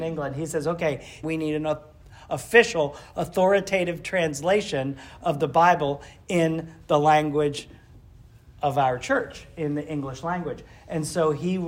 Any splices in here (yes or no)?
yes